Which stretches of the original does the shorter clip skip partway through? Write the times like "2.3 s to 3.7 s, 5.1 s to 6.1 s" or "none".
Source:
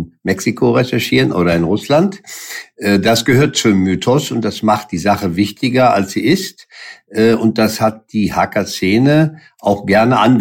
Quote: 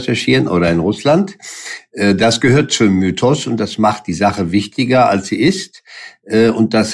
none